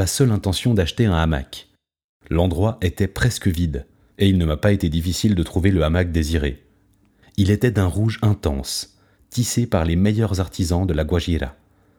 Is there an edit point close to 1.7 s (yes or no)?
no